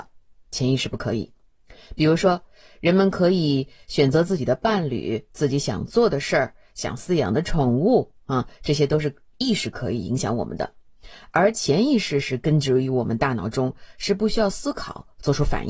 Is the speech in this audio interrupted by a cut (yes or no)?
no